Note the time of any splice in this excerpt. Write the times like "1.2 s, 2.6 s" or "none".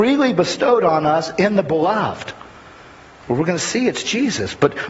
3.2 s